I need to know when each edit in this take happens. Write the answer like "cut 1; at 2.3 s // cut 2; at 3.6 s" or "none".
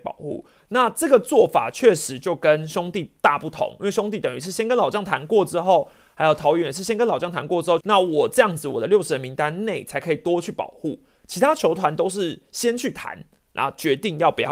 cut 1; at 7.8 s